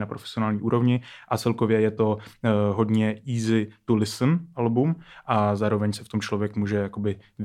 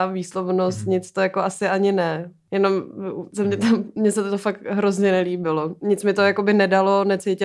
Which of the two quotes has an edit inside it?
second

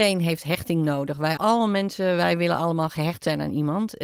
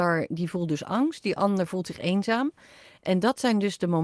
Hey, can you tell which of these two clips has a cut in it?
first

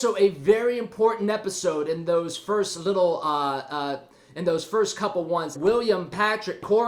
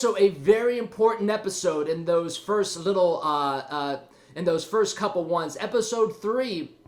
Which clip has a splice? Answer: first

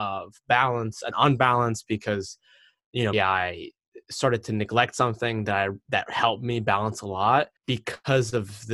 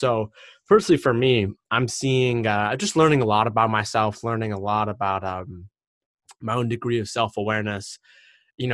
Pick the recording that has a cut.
first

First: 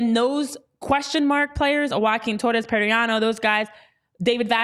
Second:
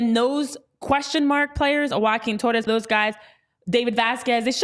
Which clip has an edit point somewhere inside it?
second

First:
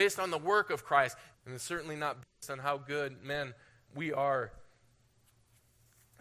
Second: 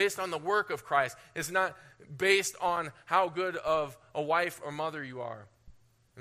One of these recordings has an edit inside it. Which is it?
first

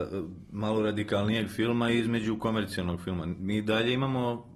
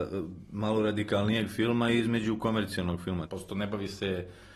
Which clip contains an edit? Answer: second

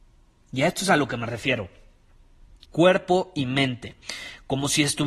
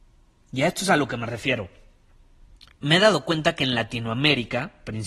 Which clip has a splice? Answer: first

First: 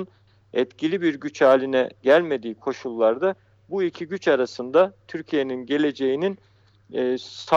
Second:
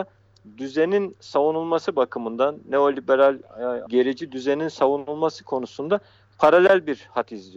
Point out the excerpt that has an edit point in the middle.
second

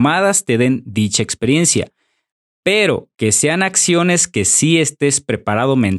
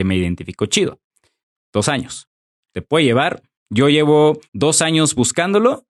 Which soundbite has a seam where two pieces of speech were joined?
second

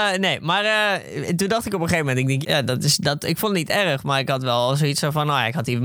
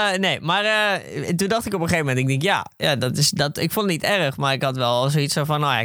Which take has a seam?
first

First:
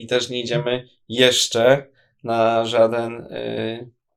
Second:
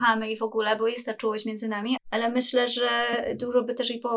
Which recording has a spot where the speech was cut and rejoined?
second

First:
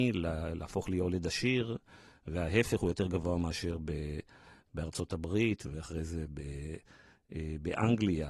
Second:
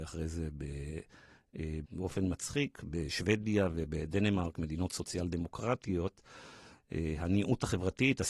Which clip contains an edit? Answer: second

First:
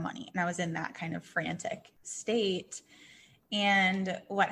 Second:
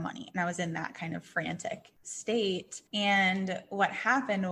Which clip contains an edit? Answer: second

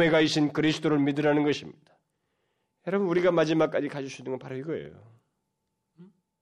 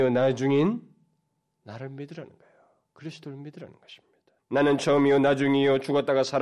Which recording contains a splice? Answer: second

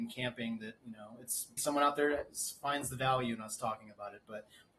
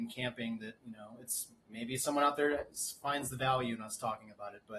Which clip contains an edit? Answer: first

